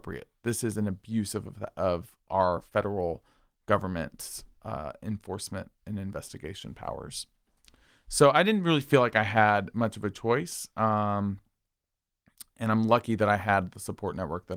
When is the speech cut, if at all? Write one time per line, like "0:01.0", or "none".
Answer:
none